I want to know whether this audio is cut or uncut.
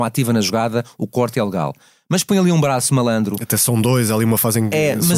uncut